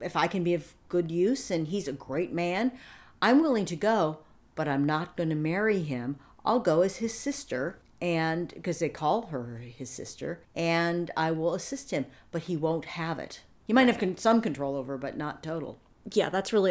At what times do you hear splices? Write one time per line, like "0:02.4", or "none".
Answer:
0:13.6